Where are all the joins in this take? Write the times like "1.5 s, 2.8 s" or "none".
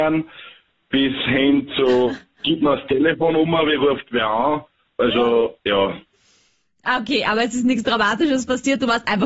none